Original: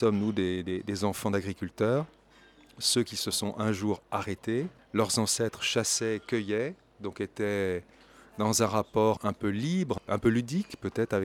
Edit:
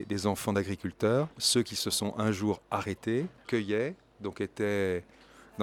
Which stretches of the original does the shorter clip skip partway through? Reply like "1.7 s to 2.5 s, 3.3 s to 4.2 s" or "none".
2.1 s to 2.7 s, 4.9 s to 6.2 s

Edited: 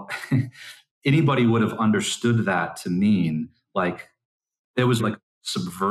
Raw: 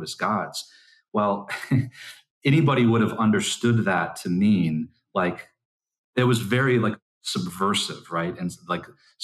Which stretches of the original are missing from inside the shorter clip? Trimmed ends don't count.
6.4 s to 6.8 s

